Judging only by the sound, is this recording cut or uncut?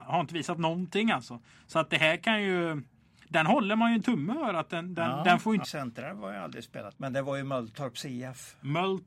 cut